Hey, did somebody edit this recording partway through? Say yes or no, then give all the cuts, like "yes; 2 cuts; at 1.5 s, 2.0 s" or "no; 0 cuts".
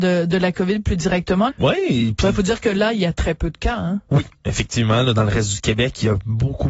yes; 1 cut; at 1.5 s